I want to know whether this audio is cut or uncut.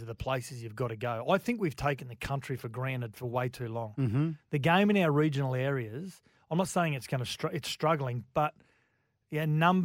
uncut